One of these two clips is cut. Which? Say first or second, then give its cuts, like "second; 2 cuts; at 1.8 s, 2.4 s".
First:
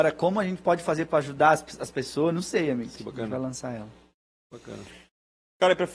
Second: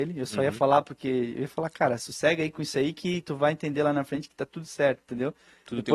first; 1 cut; at 3.0 s